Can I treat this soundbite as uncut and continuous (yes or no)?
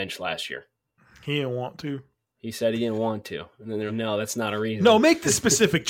no